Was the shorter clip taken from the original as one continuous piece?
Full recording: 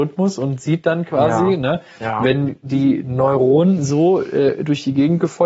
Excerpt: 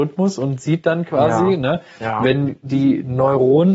yes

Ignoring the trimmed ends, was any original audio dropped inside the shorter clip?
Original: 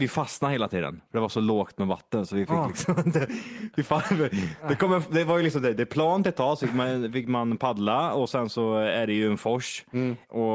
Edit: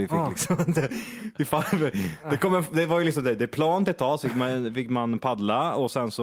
no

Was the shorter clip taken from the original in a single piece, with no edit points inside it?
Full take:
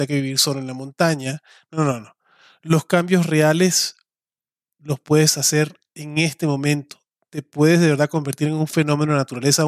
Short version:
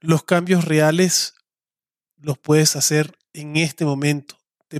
yes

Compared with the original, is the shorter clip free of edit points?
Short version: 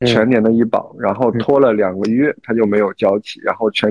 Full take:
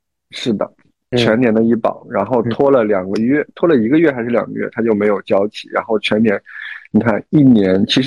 no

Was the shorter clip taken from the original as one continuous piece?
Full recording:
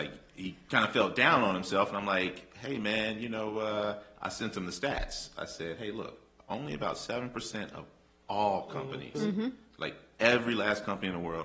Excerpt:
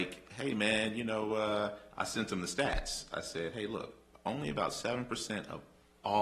yes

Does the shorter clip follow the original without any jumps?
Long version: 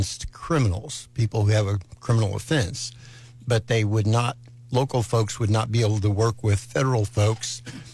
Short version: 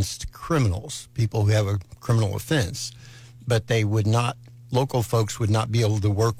yes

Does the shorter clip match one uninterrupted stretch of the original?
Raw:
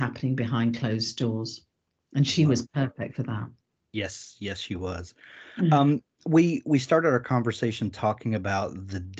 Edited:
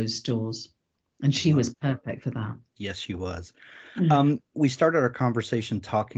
no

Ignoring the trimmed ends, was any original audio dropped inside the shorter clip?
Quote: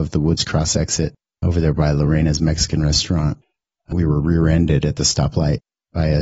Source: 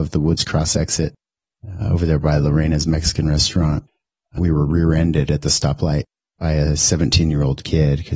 yes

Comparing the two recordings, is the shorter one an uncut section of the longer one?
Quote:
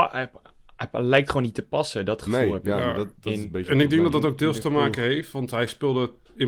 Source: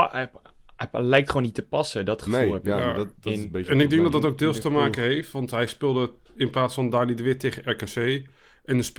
yes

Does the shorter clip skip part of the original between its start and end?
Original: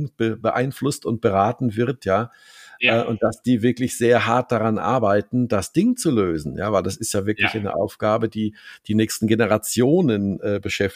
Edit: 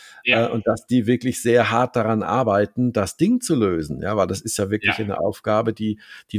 no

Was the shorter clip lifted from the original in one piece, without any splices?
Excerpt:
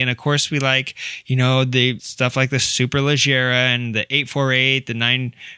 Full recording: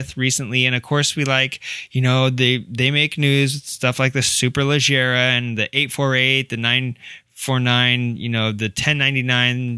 no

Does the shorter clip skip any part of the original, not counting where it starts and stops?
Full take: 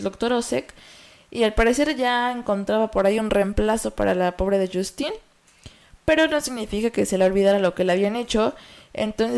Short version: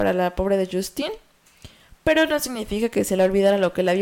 no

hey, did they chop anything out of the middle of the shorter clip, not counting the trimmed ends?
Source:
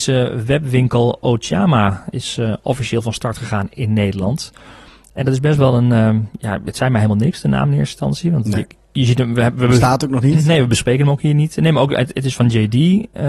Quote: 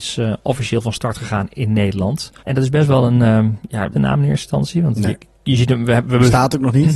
yes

